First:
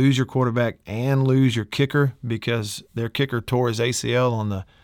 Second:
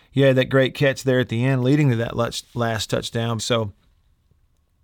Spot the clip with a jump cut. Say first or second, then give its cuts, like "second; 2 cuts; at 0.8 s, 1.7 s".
second; 1 cut; at 3.4 s